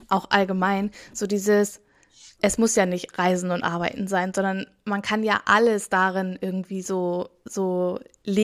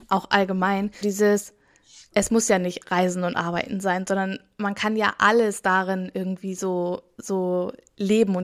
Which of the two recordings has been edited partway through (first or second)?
second